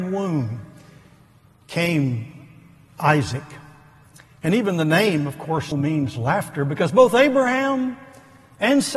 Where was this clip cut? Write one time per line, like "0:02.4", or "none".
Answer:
0:05.7